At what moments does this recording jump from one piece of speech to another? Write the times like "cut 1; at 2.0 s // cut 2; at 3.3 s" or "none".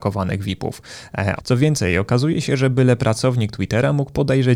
cut 1; at 1.4 s